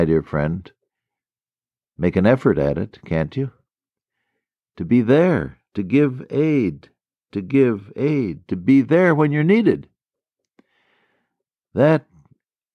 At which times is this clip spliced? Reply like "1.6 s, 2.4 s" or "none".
none